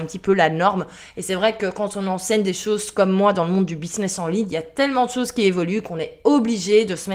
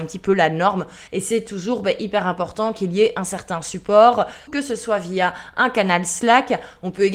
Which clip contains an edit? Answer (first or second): second